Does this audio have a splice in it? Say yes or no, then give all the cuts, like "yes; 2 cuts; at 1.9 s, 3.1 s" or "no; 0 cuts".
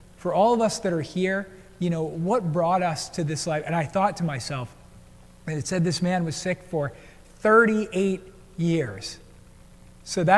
no; 0 cuts